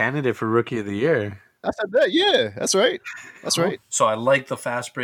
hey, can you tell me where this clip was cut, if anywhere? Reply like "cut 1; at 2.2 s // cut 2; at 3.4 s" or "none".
cut 1; at 3.7 s